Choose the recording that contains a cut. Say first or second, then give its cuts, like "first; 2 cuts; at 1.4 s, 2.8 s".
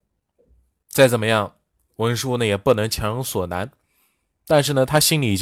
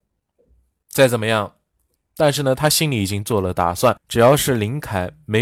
second; 1 cut; at 2.0 s